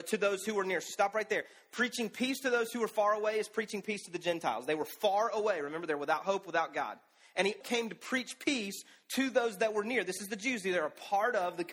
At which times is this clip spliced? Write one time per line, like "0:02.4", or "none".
0:07.6